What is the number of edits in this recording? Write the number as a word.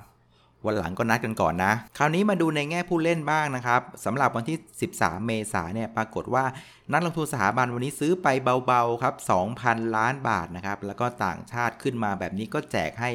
one